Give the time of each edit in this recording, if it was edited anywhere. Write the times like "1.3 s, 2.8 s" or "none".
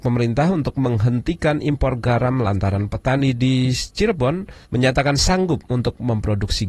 4.6 s